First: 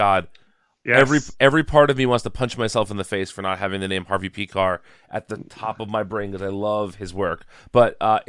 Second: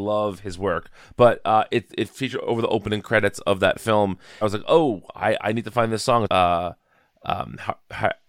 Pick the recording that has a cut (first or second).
second